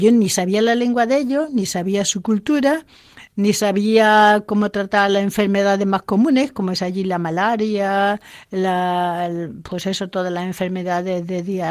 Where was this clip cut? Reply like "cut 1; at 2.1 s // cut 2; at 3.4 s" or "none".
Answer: none